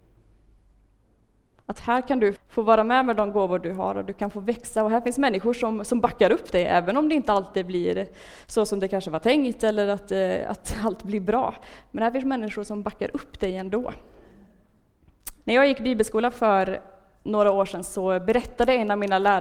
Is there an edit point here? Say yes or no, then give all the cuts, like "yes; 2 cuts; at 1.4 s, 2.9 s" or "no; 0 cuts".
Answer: yes; 2 cuts; at 2.4 s, 15.4 s